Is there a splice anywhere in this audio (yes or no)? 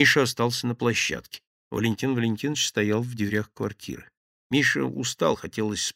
yes